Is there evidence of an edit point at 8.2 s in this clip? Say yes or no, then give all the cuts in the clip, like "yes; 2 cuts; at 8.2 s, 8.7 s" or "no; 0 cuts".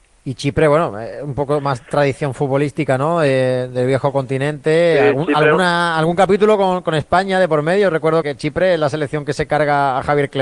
yes; 1 cut; at 8.2 s